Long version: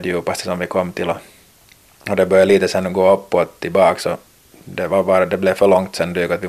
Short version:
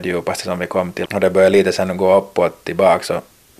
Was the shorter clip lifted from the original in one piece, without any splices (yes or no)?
no